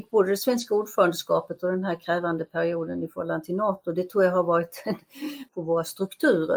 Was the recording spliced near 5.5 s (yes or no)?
yes